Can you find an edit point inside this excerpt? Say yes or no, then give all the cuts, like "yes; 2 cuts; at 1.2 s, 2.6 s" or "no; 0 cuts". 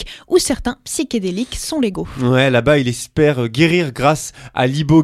no; 0 cuts